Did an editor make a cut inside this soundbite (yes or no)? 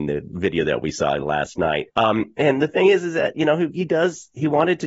yes